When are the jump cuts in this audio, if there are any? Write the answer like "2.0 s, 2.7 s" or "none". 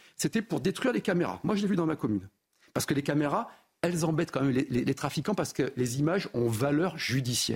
none

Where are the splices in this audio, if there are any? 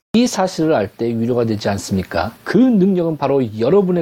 2.4 s

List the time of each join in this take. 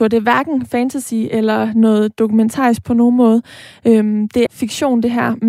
4.5 s

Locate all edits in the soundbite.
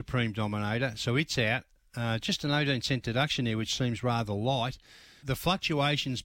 5.2 s

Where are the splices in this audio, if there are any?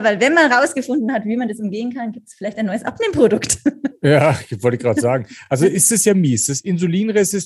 none

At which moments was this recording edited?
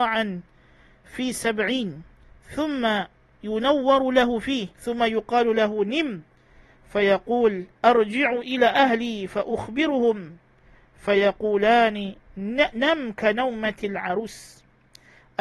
4.7 s, 7.7 s

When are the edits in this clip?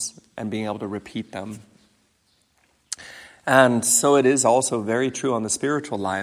none

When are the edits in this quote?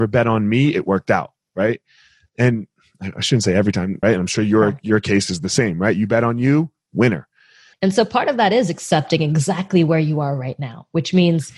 4.0 s, 7.7 s

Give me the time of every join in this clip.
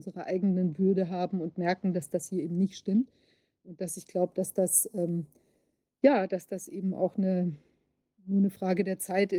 none

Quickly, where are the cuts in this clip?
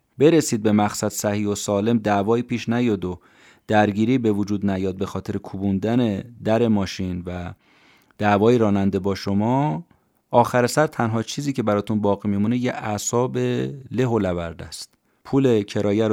none

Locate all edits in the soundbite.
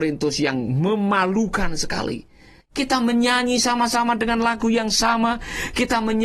2.6 s

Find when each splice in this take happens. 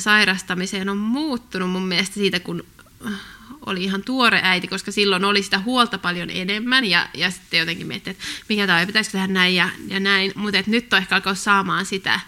none

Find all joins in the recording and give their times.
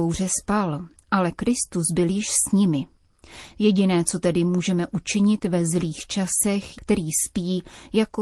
6.7 s

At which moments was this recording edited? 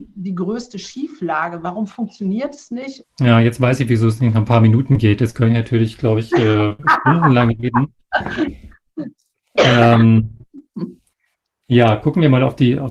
3.0 s

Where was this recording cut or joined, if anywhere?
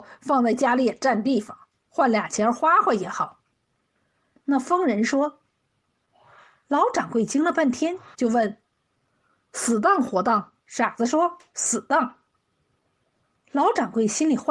8.1 s, 10.6 s

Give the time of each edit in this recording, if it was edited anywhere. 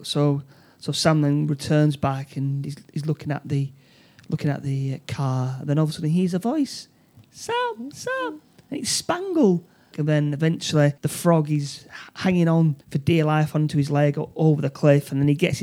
9.9 s, 11.0 s, 12.8 s

